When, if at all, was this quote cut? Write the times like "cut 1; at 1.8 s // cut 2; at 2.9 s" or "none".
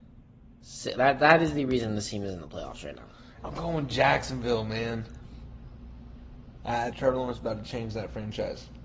cut 1; at 0.9 s // cut 2; at 3.4 s // cut 3; at 6.9 s